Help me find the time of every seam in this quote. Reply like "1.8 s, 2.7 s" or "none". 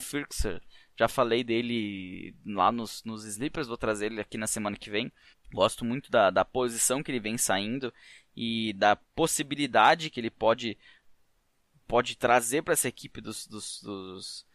5.3 s

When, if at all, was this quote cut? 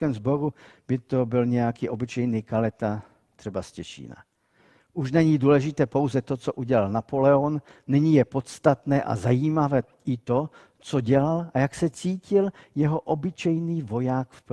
none

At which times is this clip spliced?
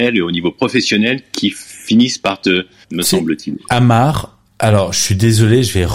2.8 s

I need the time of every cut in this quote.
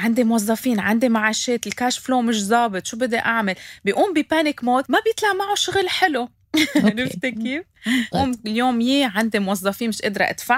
8.1 s

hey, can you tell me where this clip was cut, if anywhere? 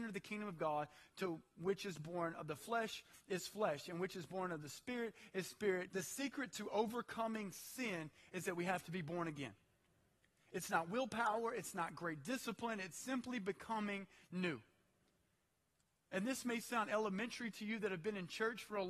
5.9 s

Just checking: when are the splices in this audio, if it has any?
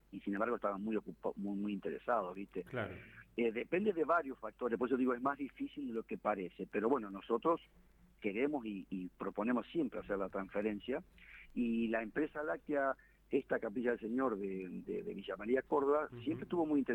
none

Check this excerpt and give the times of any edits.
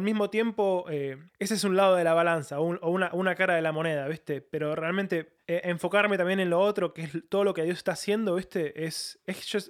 none

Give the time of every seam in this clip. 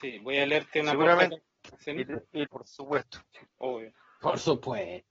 2.5 s

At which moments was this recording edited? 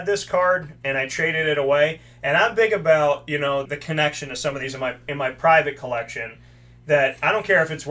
3.7 s

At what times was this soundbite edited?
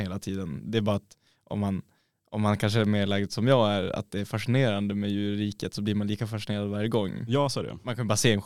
none

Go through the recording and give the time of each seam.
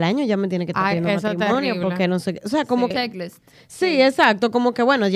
2.9 s

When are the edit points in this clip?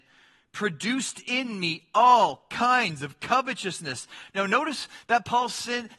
none

